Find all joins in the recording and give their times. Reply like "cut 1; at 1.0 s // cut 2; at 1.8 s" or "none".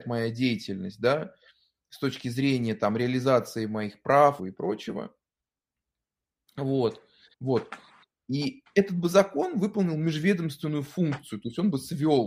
cut 1; at 4.4 s // cut 2; at 7.3 s